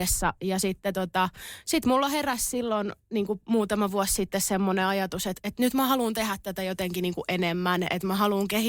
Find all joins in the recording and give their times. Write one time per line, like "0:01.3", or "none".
none